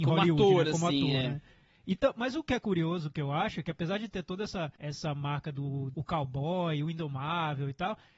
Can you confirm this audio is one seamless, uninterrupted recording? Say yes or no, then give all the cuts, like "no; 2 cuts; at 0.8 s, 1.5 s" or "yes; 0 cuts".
no; 2 cuts; at 4.8 s, 5.9 s